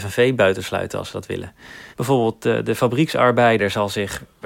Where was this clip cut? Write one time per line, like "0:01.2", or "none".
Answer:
0:01.9